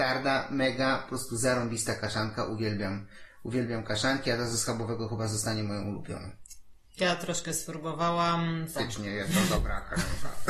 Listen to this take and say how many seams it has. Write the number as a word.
one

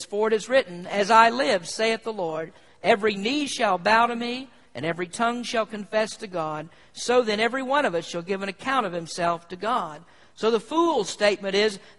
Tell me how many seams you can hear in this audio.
zero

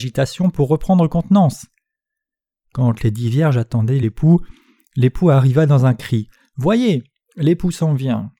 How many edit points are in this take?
zero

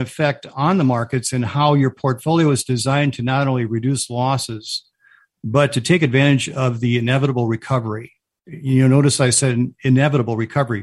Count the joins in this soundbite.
zero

